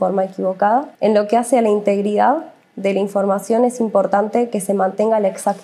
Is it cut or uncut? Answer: cut